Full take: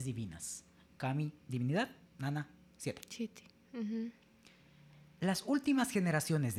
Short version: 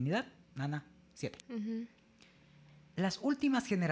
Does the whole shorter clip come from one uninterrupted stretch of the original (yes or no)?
no